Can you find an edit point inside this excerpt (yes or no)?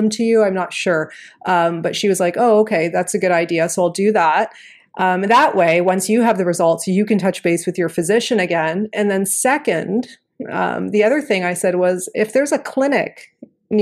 no